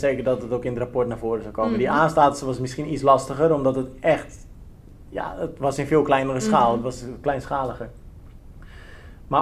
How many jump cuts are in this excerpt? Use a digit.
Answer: 0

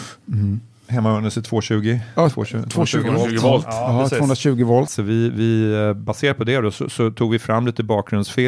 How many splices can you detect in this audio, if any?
1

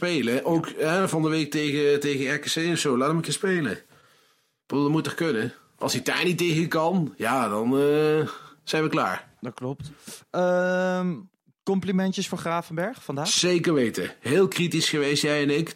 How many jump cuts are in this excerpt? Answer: 0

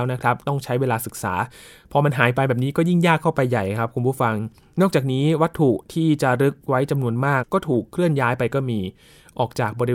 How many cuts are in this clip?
1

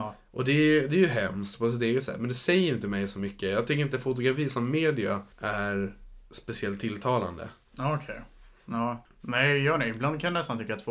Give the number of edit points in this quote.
1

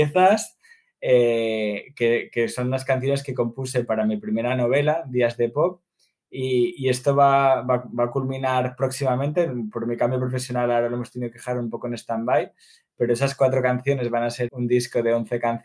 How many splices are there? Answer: 1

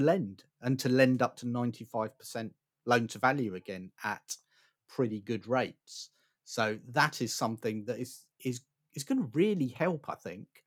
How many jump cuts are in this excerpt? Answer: 0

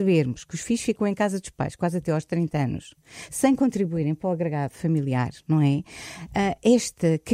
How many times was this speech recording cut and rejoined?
0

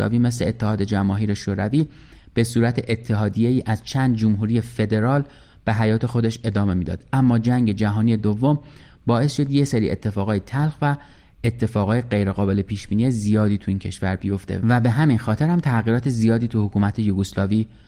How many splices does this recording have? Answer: 0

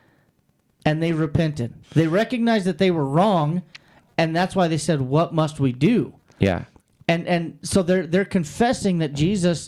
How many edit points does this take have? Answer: 1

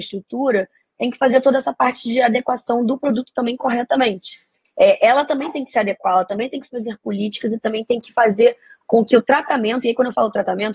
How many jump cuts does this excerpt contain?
1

